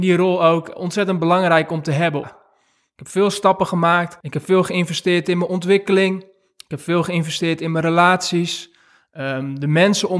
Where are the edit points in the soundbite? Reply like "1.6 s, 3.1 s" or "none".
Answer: 2.2 s